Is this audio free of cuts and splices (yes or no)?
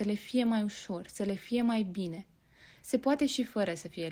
yes